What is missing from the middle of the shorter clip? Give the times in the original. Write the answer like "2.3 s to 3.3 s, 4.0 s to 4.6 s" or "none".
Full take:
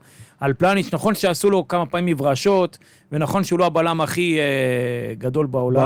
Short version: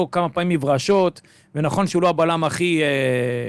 none